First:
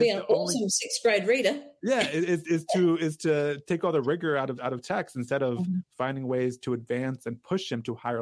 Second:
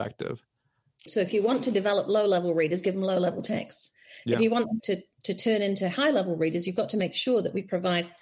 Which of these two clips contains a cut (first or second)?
second